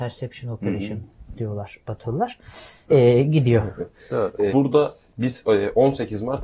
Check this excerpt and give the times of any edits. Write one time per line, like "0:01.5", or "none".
0:02.9
0:04.5